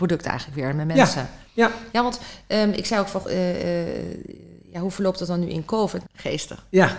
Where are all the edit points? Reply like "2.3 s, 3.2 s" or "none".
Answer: 1.9 s, 3.2 s, 6.0 s